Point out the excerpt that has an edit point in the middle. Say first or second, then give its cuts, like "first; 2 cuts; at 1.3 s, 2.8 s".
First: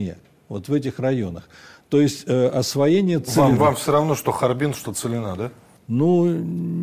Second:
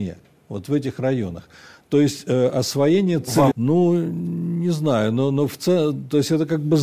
second; 1 cut; at 3.5 s